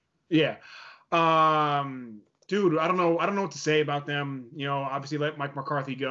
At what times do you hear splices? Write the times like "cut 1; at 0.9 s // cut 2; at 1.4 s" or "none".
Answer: none